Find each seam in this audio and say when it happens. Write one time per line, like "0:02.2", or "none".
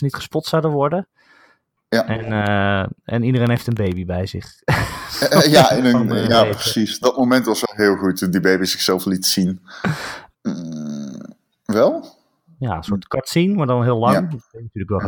0:10.3
0:12.6